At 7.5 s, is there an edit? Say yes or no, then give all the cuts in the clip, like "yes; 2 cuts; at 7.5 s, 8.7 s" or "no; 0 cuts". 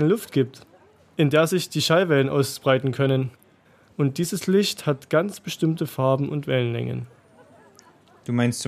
no; 1 cut; at 3.9 s